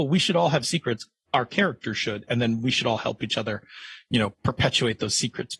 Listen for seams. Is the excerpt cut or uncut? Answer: uncut